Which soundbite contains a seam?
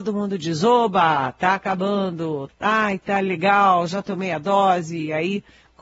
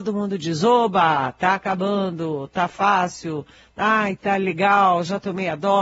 first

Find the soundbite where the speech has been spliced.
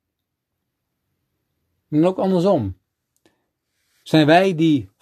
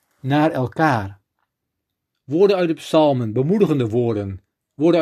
second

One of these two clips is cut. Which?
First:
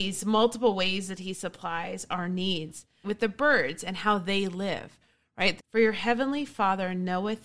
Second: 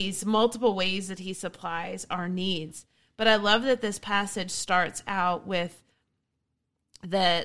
first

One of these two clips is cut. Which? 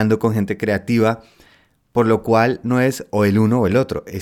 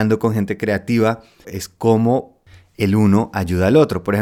second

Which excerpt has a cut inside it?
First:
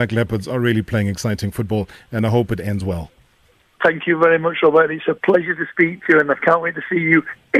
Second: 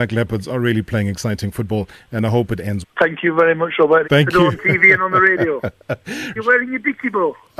second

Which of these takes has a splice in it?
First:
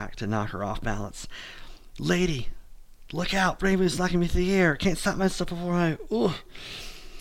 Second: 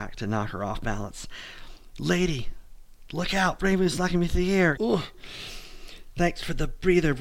second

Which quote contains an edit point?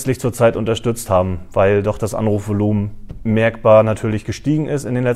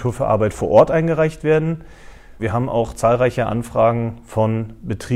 second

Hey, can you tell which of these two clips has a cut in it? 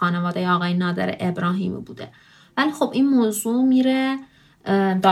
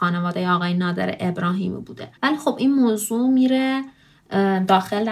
second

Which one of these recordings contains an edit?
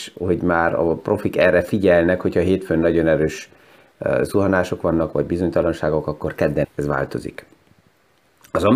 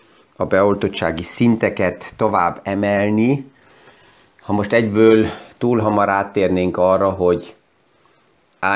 first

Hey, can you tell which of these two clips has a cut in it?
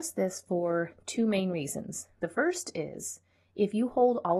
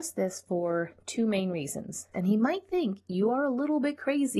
second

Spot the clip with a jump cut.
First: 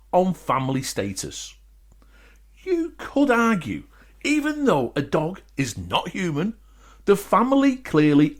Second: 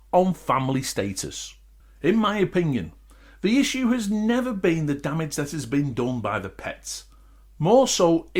second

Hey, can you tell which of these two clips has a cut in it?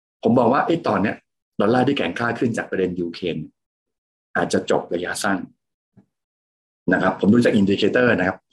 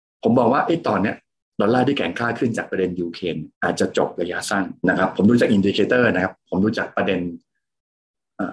second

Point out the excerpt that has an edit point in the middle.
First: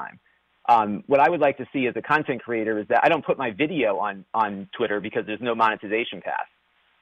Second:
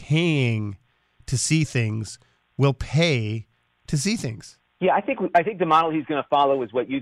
second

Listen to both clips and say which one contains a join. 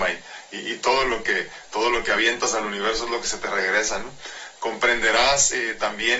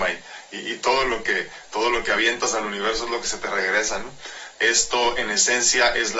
second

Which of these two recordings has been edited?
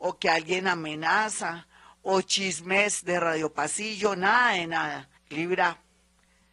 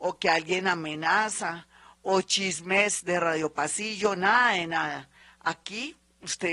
first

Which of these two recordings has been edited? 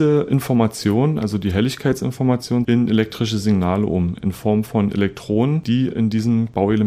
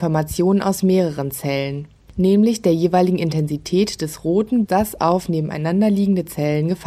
second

